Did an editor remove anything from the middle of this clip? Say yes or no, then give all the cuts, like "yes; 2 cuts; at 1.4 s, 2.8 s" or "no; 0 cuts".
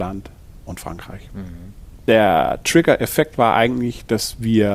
no; 0 cuts